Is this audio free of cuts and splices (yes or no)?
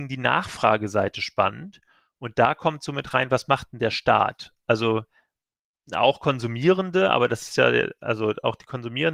yes